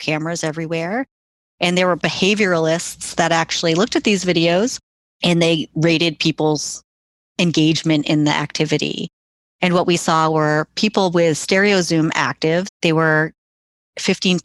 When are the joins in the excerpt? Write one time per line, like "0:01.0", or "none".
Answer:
0:12.7

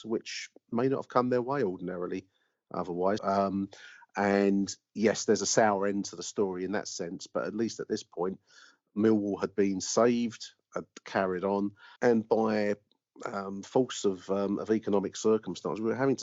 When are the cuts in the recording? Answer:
0:03.2
0:12.0

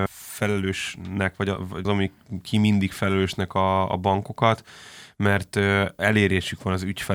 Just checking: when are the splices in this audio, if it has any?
0:01.8

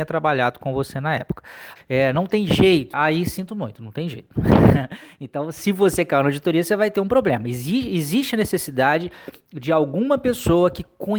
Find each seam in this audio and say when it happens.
0:01.8
0:02.9

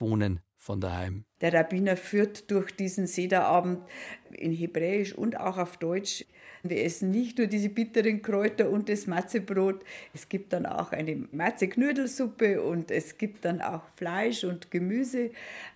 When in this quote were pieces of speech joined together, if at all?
none

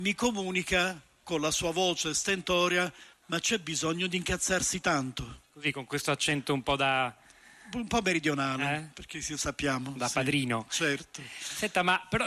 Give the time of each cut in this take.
0:03.1
0:05.5

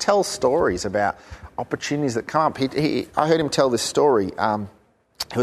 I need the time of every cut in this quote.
none

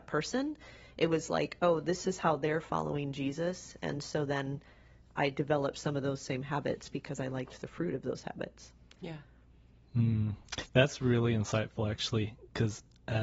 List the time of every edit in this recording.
none

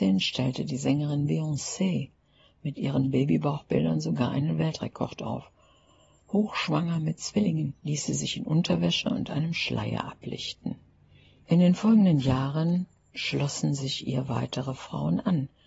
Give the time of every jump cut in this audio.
0:11.4

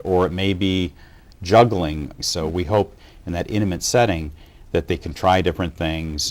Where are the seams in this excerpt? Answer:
0:02.2

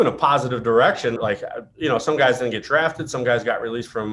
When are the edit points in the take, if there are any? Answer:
0:01.2

